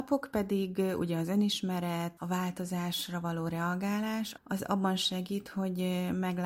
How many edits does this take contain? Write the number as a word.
two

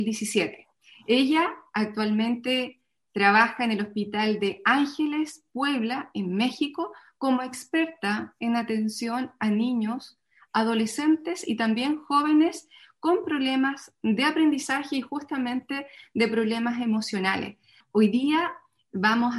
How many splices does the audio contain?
one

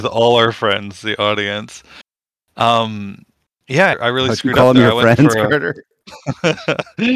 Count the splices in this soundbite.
one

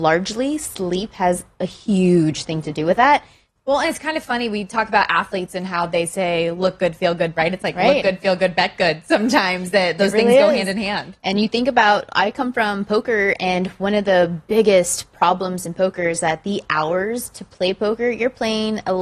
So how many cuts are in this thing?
two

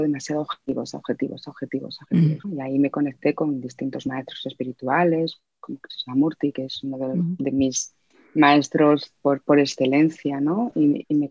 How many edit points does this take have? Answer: one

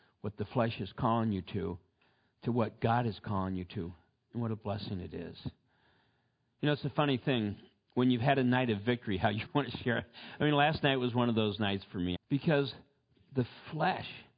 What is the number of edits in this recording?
two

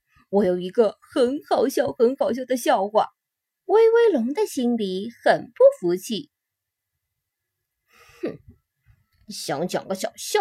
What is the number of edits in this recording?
one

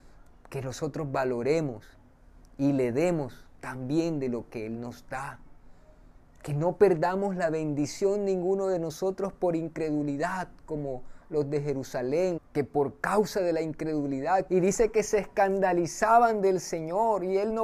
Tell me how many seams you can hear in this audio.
two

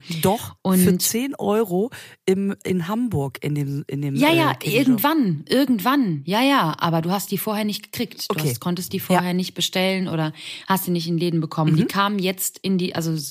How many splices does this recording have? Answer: zero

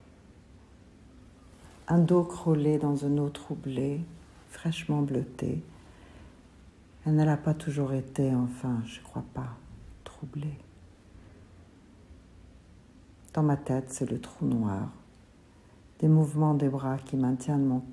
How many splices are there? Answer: zero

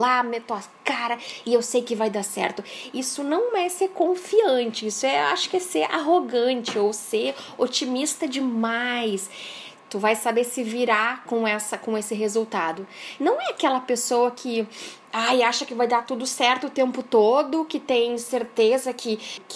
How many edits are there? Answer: two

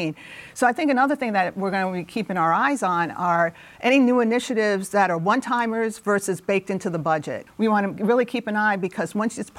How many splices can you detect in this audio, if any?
one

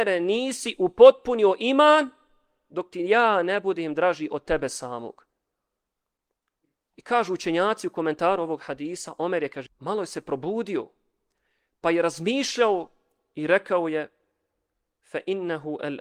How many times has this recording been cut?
one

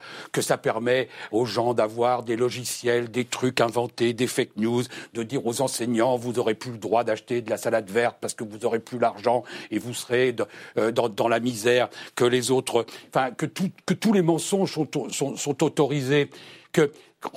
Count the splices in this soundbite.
one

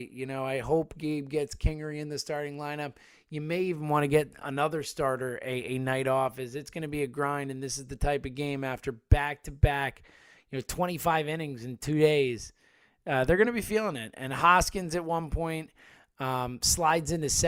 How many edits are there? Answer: zero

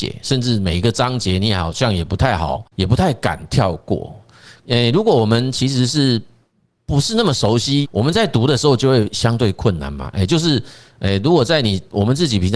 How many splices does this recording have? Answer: three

